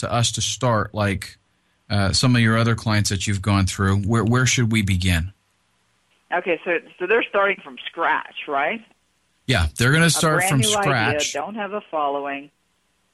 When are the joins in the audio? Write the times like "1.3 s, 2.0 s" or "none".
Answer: none